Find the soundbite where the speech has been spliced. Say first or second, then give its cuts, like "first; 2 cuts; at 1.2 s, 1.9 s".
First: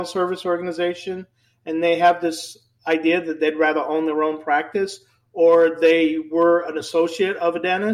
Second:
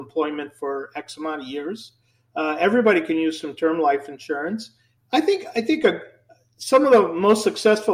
second; 1 cut; at 5.0 s